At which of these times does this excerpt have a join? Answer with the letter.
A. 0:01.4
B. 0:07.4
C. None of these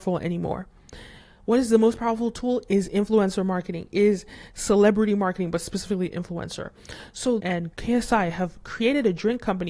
B